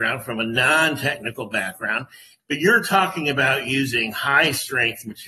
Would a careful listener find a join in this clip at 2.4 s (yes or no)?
yes